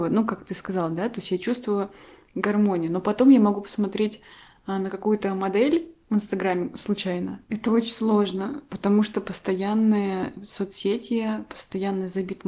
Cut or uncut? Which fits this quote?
cut